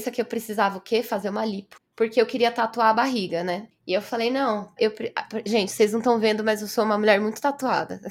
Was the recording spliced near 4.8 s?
yes; 1 cut; at 4.8 s

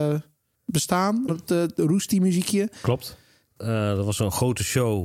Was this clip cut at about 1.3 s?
yes; 2 cuts; at 1.3 s, 3.6 s

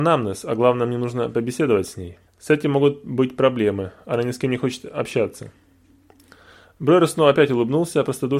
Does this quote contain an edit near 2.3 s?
yes; 1 cut; at 2.3 s

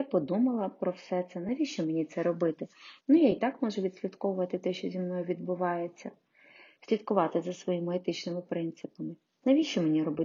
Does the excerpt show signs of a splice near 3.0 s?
yes; 1 cut; at 3.0 s

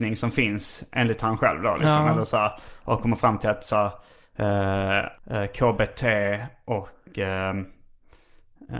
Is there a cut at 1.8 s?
no; 1 cut; at 5.1 s

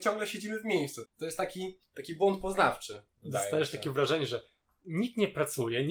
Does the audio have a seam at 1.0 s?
yes; 1 cut; at 1.0 s

